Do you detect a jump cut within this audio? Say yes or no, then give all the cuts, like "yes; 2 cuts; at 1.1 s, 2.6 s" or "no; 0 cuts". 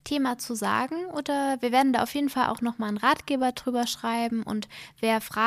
no; 0 cuts